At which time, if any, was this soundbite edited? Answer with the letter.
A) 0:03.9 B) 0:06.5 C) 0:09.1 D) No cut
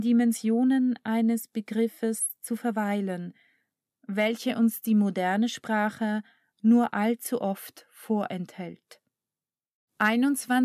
B